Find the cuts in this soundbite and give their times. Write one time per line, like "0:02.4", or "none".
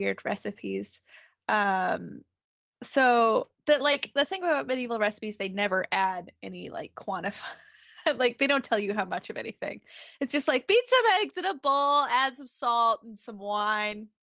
none